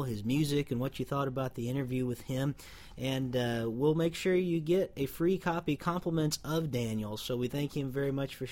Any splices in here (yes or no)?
no